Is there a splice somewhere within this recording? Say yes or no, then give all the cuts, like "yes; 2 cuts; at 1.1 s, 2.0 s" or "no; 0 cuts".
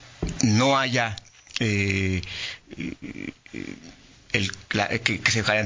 no; 0 cuts